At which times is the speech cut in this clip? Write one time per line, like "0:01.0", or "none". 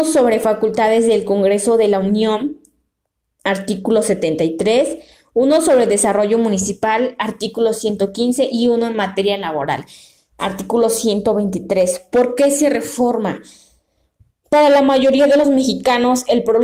none